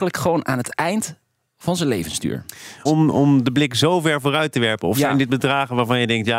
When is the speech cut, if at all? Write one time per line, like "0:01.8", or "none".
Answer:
0:02.9